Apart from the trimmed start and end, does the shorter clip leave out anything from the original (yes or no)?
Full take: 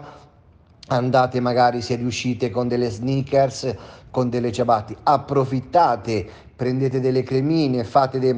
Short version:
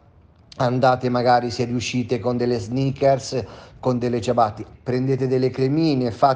yes